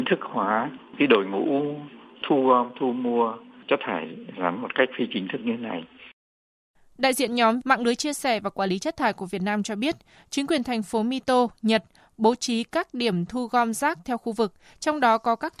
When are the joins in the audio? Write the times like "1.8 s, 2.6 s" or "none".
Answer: none